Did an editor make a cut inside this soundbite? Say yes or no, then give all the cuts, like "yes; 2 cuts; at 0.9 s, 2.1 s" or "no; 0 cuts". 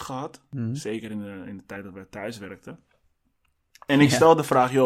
no; 0 cuts